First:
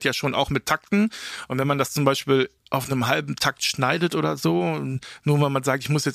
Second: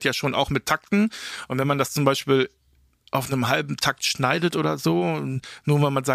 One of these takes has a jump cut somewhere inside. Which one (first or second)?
first